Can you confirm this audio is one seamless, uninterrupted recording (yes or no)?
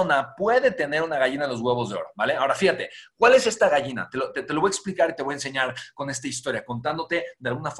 yes